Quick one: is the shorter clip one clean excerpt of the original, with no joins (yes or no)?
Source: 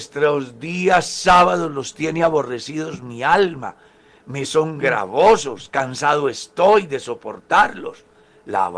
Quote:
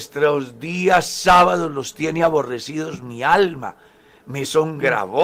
yes